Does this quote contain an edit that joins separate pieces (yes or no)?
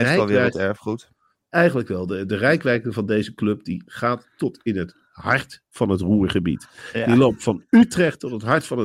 no